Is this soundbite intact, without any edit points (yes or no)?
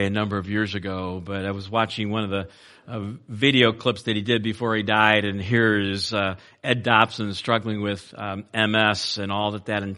yes